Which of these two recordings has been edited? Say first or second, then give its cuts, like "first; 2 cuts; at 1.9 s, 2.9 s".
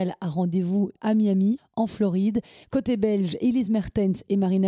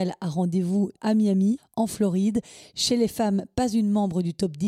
first; 1 cut; at 2.6 s